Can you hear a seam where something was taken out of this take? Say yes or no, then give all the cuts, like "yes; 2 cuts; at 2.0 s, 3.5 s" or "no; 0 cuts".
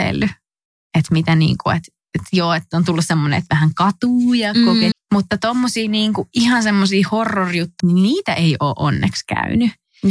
yes; 2 cuts; at 4.9 s, 7.8 s